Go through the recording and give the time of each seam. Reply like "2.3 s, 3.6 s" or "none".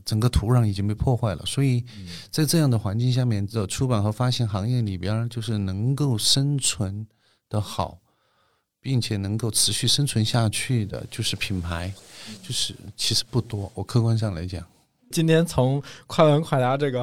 none